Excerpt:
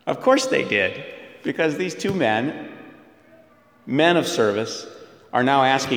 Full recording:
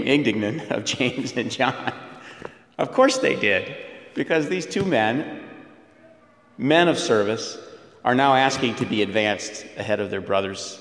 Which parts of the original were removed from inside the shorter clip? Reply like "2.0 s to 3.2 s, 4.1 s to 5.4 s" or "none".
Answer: none